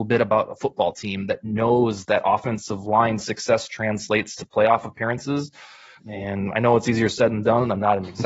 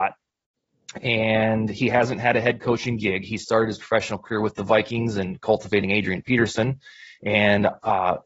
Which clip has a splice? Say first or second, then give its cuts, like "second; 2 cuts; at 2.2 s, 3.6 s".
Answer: first; 1 cut; at 6.0 s